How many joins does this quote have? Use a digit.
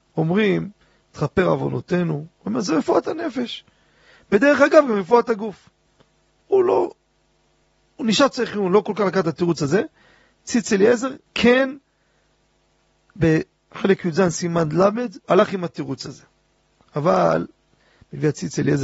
2